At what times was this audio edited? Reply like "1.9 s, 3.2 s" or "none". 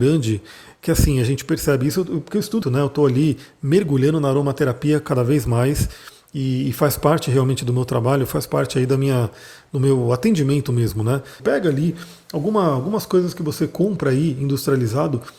2.6 s, 11.4 s